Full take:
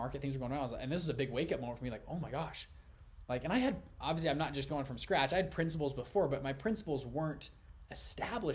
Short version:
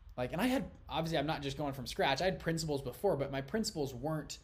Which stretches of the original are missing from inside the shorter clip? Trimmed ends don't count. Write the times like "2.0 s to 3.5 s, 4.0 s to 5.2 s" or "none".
none